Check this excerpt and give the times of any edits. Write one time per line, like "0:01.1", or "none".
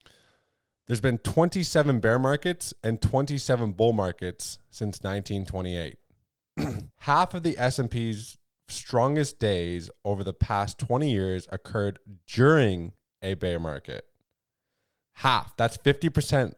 0:06.9